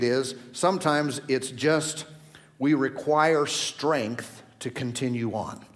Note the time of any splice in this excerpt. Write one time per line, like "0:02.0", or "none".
none